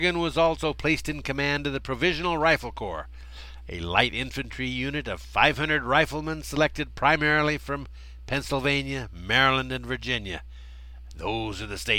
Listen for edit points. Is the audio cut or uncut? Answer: uncut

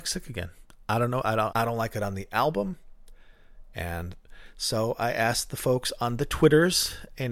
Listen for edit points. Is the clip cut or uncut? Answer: cut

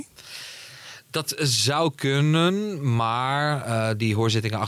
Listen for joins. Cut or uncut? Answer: uncut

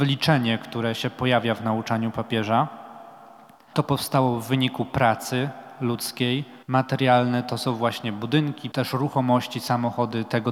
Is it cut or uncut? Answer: cut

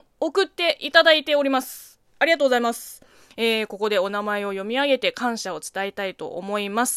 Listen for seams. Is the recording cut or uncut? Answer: uncut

